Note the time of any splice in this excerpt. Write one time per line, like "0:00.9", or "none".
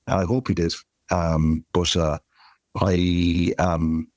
none